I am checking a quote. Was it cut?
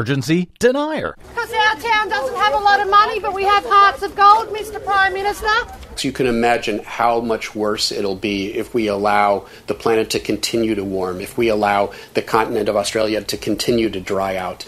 yes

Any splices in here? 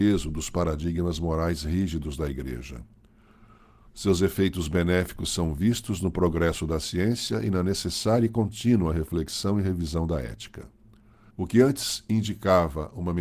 yes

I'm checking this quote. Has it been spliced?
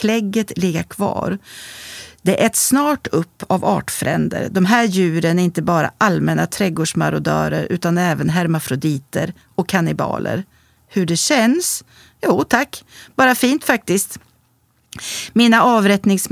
no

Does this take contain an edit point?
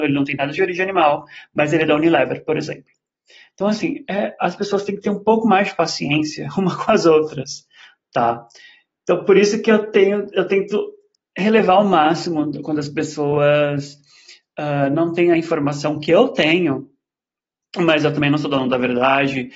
no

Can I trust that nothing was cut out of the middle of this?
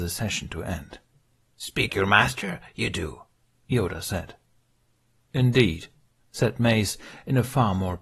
no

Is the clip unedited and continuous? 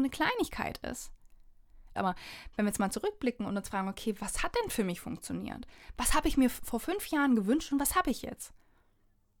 no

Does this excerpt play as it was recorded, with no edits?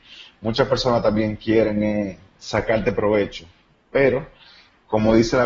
yes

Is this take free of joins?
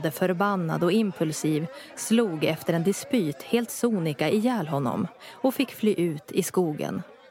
yes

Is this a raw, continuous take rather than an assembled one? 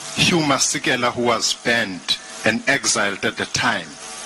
yes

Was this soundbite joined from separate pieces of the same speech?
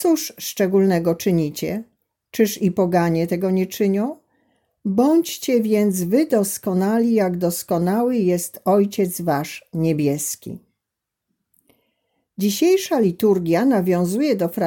no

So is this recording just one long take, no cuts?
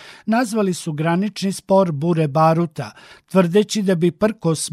yes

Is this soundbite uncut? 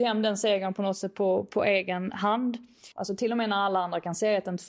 no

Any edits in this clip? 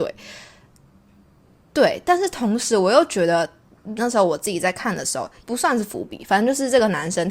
yes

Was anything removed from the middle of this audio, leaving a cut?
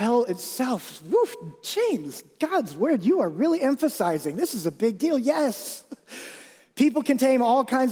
no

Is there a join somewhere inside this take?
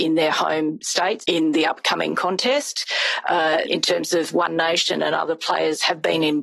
yes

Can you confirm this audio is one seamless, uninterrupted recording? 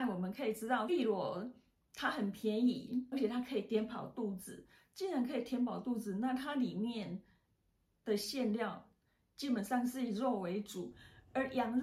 yes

